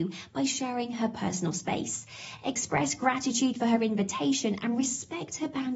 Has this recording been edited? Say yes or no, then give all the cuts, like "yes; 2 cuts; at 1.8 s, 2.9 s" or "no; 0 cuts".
no; 0 cuts